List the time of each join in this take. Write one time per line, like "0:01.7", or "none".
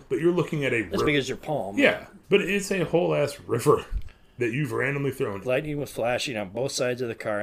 0:01.0
0:02.2
0:05.4